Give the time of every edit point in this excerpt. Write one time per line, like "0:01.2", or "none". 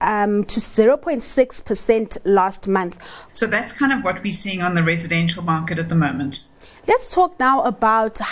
0:03.3